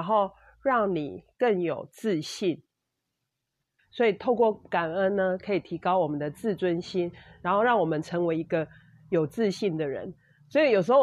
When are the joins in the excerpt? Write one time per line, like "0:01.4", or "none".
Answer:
0:03.8

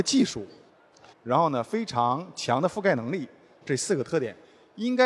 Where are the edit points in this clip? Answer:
0:01.1
0:03.6

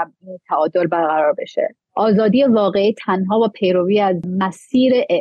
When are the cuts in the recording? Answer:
0:01.8

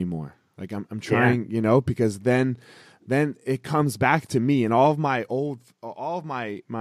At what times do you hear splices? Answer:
none

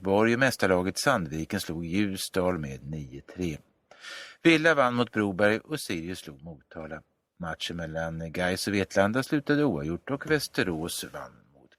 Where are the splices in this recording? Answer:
none

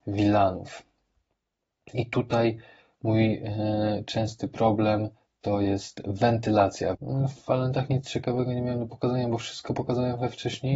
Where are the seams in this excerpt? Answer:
0:06.9

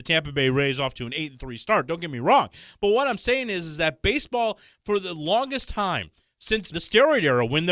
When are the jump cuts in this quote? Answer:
0:06.7

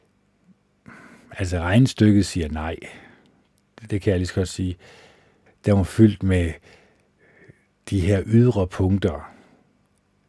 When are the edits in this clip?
0:05.5

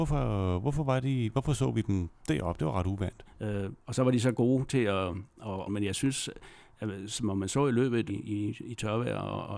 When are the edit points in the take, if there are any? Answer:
0:03.3
0:05.7
0:08.1

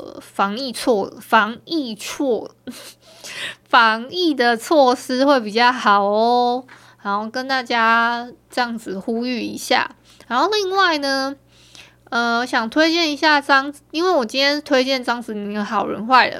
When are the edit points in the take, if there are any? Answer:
none

